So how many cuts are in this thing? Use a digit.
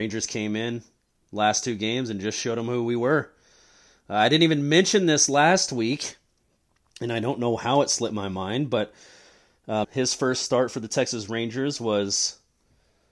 1